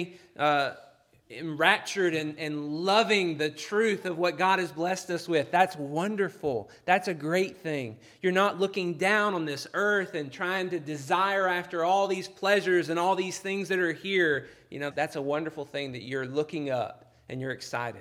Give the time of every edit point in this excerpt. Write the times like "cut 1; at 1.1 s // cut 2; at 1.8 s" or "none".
cut 1; at 14.9 s